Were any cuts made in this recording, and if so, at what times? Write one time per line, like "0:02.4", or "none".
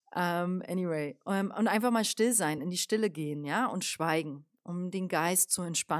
none